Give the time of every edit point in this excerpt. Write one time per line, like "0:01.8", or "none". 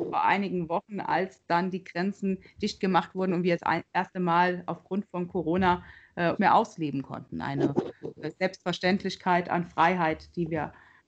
0:06.3